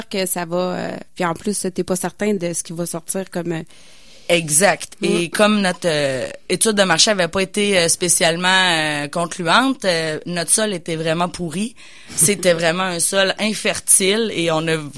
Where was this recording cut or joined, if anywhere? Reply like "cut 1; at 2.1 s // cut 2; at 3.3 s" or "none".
cut 1; at 2.4 s